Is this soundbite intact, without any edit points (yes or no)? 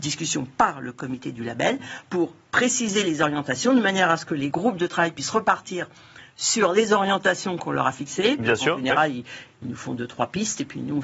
yes